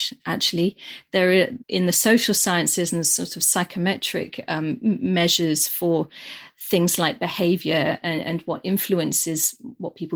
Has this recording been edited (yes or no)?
no